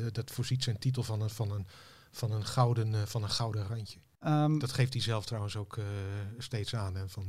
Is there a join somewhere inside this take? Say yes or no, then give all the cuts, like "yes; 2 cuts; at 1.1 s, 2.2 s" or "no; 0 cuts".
yes; 1 cut; at 4.2 s